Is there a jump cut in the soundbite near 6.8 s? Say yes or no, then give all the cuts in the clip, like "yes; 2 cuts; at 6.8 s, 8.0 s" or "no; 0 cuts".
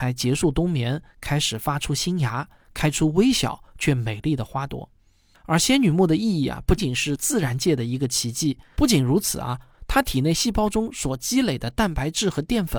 yes; 2 cuts; at 6.8 s, 8.8 s